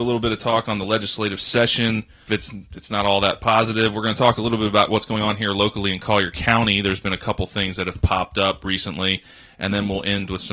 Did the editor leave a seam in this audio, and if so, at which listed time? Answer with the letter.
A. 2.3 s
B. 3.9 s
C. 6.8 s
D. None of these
A